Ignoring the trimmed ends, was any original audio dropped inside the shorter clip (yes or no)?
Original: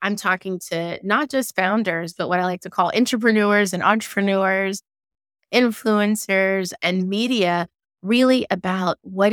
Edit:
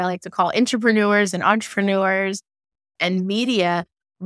yes